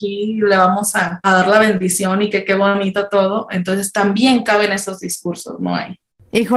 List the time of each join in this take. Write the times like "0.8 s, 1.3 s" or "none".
1.2 s